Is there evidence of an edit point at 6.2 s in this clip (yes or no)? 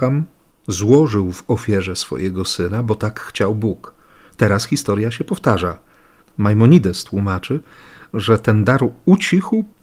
yes